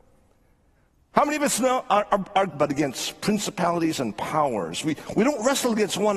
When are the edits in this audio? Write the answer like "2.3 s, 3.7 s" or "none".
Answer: 2.5 s